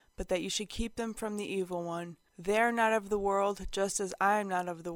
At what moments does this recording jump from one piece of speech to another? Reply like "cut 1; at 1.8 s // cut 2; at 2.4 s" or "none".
none